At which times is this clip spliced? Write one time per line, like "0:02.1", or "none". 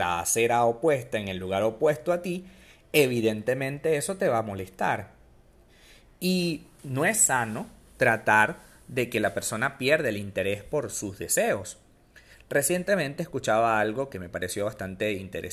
none

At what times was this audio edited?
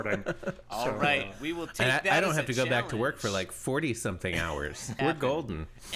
0:05.0

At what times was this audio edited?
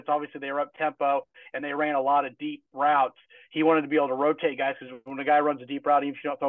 none

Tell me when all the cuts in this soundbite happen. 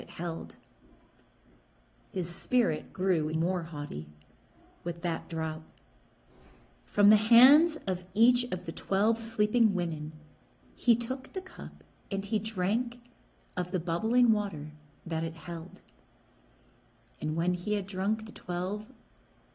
0:03.3

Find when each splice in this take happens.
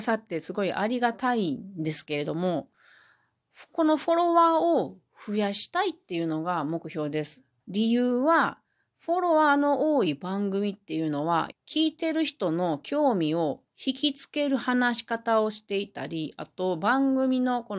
0:07.6
0:11.5

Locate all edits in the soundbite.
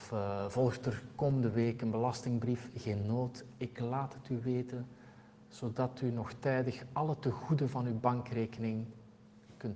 none

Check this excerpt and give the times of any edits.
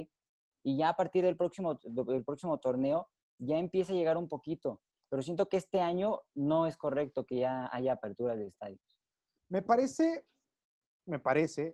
0:09.4

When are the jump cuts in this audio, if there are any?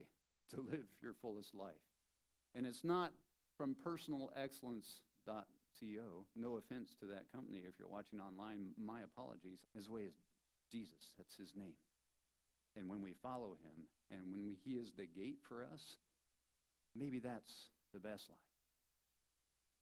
0:09.6

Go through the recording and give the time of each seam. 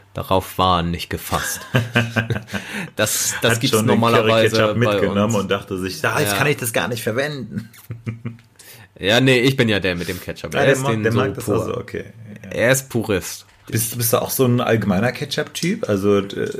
0:13.7

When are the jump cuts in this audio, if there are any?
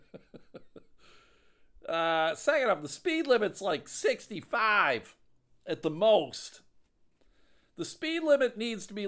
none

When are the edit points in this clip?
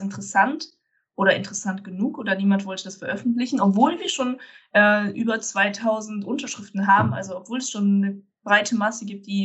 none

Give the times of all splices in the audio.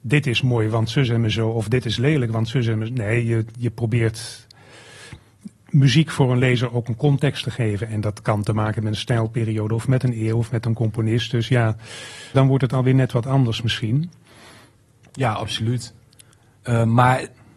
0:12.3

